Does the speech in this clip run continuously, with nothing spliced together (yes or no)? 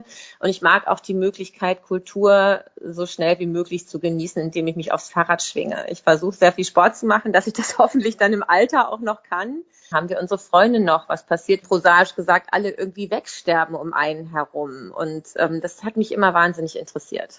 no